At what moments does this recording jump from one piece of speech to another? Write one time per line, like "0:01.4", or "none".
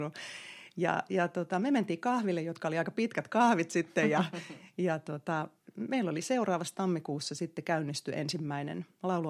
none